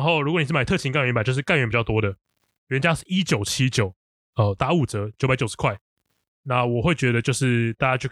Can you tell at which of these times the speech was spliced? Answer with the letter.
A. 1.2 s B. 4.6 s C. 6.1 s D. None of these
B